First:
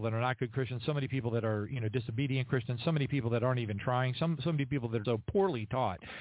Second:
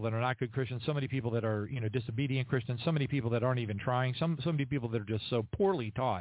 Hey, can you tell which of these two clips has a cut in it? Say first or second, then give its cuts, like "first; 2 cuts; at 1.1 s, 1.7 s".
first; 1 cut; at 5.0 s